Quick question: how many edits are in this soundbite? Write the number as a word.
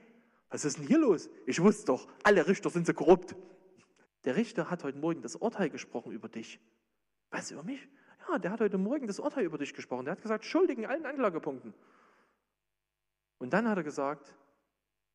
one